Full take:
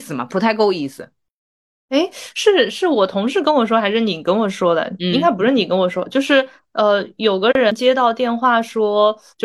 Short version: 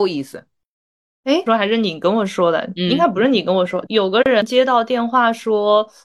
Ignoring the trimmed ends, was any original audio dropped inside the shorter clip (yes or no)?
yes